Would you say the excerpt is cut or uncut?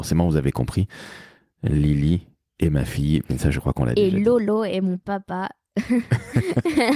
uncut